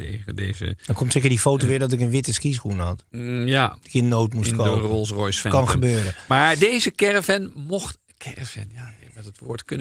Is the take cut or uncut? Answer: uncut